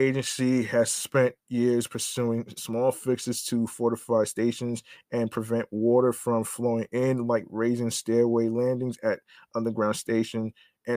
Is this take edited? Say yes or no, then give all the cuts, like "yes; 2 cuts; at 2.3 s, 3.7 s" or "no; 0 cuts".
no; 0 cuts